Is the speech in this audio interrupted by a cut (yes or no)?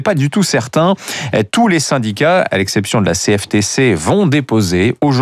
no